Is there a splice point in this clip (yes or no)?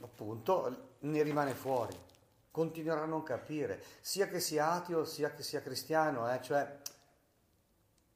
no